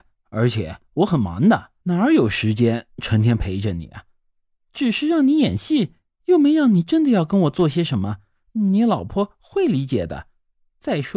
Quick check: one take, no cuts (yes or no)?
no